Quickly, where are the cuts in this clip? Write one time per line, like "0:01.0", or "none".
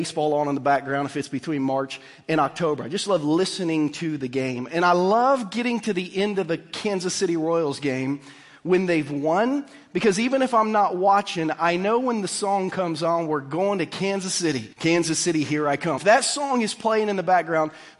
0:14.7
0:16.0